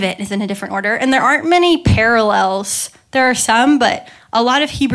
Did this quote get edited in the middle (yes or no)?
no